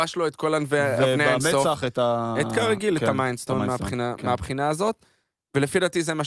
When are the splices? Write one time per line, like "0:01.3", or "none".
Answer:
none